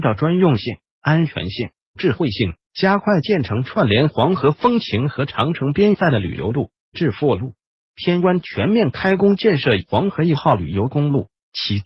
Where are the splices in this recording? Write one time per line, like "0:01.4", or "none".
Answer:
0:02.6
0:07.9